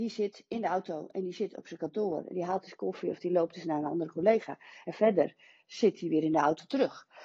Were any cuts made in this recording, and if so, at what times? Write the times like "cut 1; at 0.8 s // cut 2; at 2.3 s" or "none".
none